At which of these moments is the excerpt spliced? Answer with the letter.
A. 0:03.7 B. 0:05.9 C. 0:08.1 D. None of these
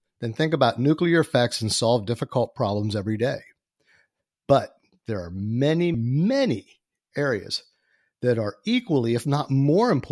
B